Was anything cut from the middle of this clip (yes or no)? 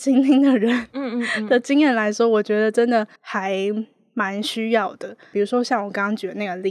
yes